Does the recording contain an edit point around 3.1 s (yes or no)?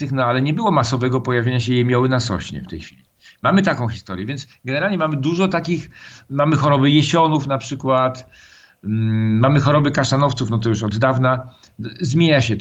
no